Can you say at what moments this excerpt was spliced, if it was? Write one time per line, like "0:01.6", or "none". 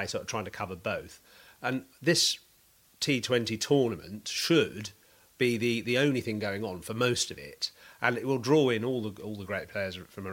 none

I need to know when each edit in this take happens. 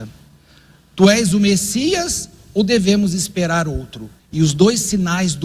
0:04.2

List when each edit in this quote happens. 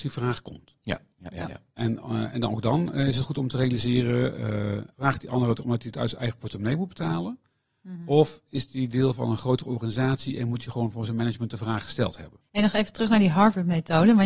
0:04.9

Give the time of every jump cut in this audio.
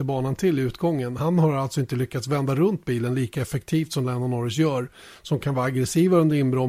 none

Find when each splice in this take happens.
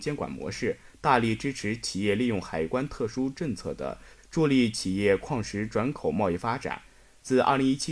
0:04.2

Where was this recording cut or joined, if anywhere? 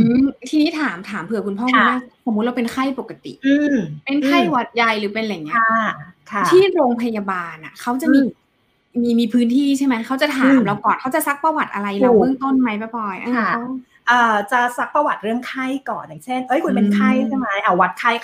none

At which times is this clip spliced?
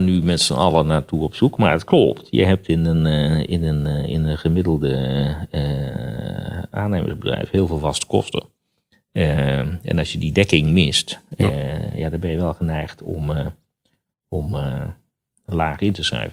none

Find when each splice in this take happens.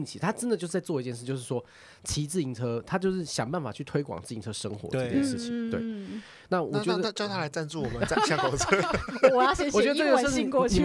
none

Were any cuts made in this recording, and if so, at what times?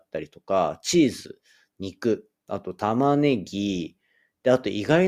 none

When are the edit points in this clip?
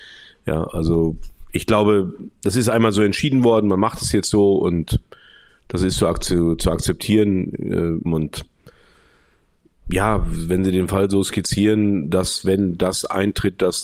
0:08.1

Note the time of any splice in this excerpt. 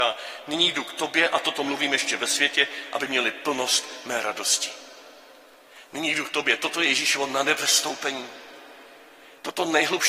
none

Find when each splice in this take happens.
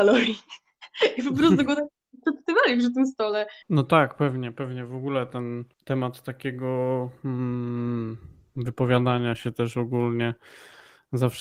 0:03.6
0:05.7

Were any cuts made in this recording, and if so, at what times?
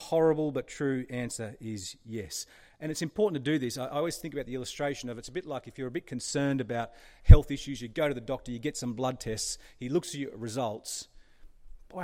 none

